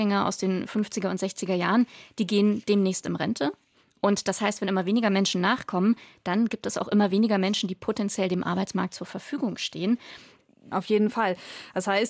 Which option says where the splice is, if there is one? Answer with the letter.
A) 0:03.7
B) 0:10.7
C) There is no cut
B